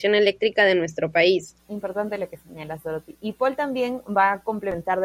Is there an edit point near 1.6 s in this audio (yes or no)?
yes